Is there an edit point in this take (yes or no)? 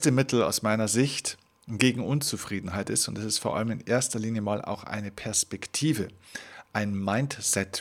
no